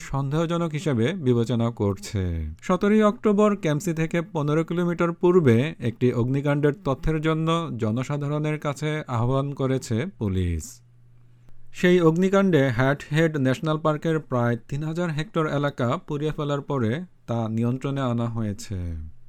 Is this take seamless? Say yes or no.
no